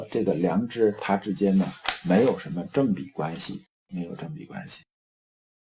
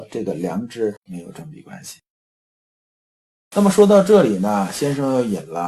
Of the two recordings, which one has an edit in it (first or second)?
second